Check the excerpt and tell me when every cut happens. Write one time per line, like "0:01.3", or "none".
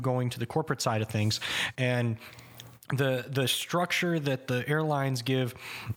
0:01.7